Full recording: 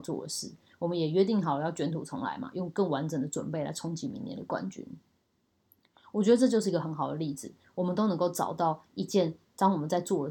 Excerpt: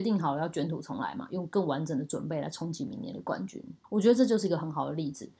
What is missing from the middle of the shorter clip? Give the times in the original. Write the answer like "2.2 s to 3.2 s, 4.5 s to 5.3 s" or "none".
5.1 s to 6.1 s